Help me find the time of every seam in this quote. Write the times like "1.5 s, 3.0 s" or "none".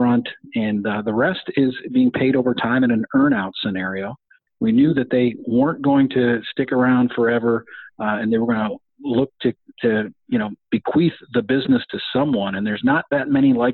4.5 s